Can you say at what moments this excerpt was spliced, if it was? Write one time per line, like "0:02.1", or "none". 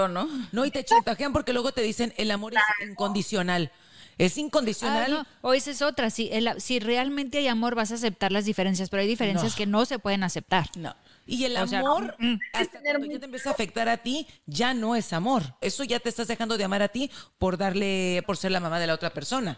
0:15.6
0:18.2